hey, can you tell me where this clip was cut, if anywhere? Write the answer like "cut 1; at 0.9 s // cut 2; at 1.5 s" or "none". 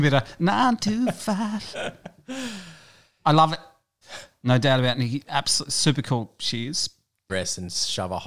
cut 1; at 4.0 s // cut 2; at 7.3 s